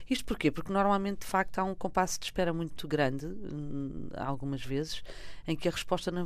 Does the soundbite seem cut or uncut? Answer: uncut